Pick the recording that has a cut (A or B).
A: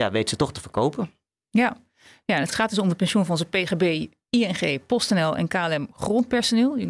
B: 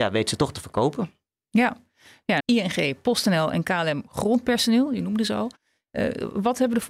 B